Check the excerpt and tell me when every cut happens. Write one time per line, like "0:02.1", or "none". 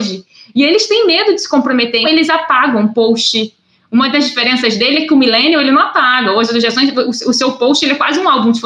0:02.0